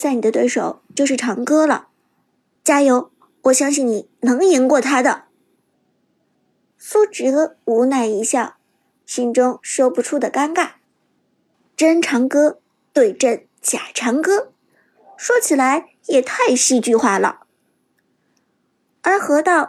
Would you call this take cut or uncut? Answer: uncut